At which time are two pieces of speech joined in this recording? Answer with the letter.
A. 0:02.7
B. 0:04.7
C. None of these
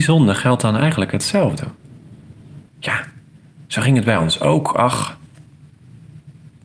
A